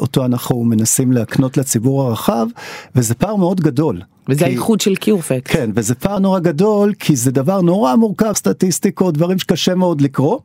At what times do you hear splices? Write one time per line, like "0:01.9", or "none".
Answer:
0:06.2
0:08.3